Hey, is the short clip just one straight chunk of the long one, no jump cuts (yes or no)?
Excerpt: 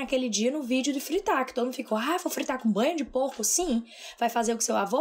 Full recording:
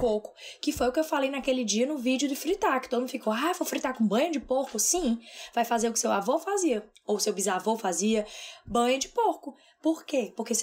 yes